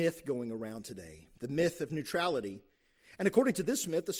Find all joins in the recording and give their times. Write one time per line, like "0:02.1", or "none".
0:01.3